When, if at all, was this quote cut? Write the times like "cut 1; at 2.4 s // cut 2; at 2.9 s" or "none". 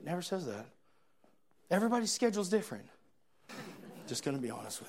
cut 1; at 3.5 s

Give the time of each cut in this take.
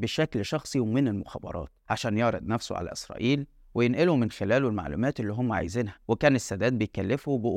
cut 1; at 6.0 s

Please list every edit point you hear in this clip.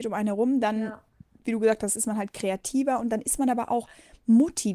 none

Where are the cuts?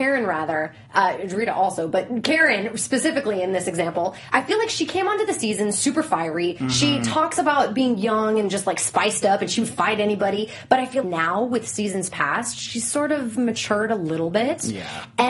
cut 1; at 4.3 s // cut 2; at 11.0 s

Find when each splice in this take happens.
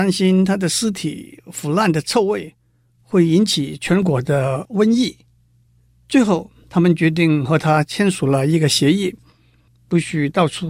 cut 1; at 9.7 s

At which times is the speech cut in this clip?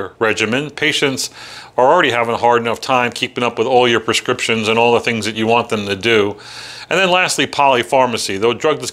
none

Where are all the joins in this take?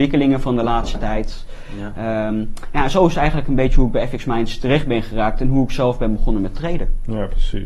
none

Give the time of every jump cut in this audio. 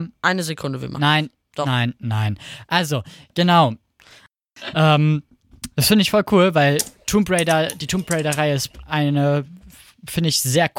cut 1; at 4.7 s

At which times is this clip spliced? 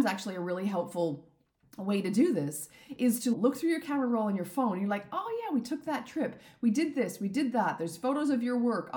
none

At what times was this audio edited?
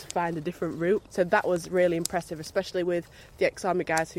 cut 1; at 1.1 s

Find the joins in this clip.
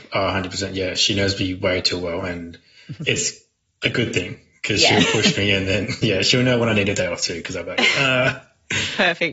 none

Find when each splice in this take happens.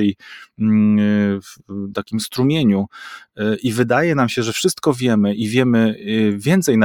cut 1; at 1.9 s

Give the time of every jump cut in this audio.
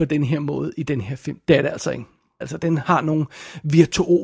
cut 1; at 2.4 s

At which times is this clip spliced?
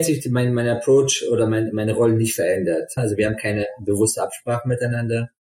cut 1; at 3.0 s

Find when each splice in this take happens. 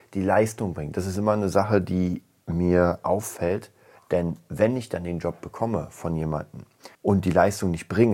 cut 1; at 4.0 s // cut 2; at 6.9 s

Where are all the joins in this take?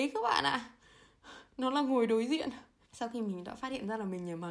cut 1; at 2.8 s

